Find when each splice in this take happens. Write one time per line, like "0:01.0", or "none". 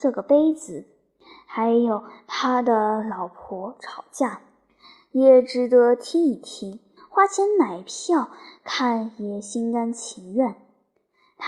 0:07.0